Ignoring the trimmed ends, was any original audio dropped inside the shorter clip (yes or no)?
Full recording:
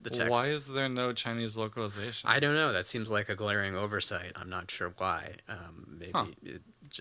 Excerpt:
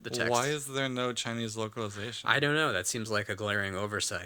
no